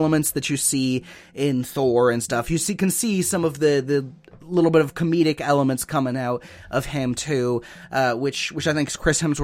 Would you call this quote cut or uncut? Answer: uncut